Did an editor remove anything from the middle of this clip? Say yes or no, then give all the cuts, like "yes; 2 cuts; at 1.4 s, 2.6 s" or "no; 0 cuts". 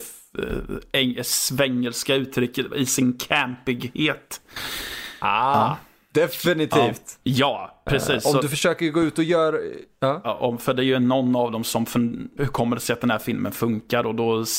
yes; 3 cuts; at 7.2 s, 10.2 s, 12.4 s